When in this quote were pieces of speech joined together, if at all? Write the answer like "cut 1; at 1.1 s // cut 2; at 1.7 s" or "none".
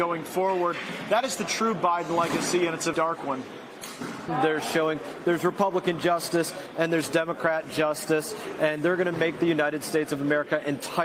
cut 1; at 2.9 s // cut 2; at 4.3 s